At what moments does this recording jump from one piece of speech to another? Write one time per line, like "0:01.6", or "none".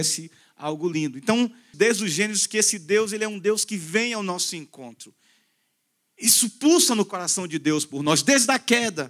0:01.7